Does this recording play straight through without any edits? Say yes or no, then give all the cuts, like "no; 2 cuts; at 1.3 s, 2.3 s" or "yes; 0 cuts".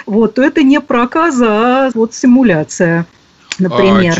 no; 1 cut; at 1.9 s